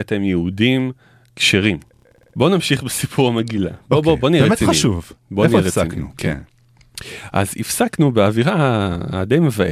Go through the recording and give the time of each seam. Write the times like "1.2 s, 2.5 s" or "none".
none